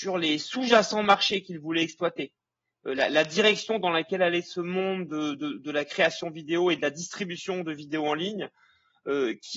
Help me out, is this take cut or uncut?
uncut